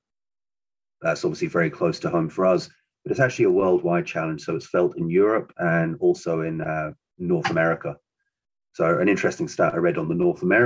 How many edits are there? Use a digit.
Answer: 0